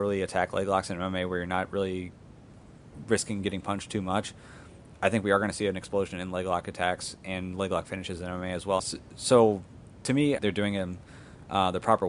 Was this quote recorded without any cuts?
no; 2 cuts; at 8.8 s, 10.4 s

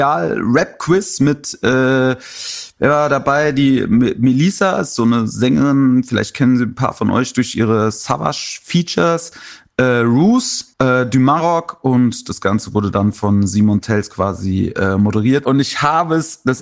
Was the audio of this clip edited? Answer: yes; 2 cuts; at 10.7 s, 15.4 s

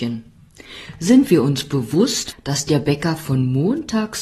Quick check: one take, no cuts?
no; 1 cut; at 2.3 s

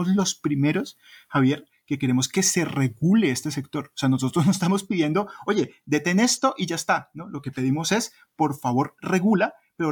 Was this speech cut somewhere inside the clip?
no; 0 cuts

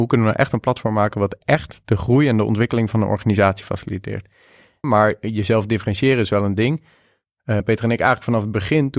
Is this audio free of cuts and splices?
no; 2 cuts; at 4.8 s, 7.6 s

